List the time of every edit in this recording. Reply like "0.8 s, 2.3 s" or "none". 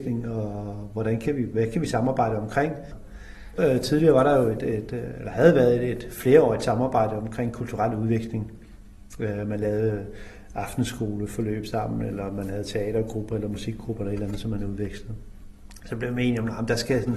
none